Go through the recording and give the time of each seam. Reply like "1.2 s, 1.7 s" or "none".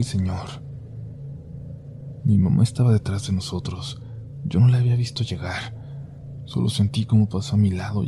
2.2 s